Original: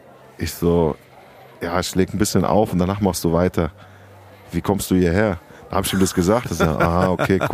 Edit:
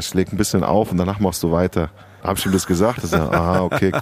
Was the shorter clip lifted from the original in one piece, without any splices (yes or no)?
no